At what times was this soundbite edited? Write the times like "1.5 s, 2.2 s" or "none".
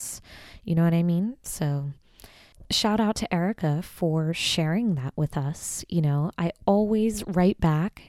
none